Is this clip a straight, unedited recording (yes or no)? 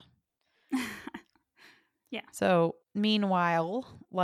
no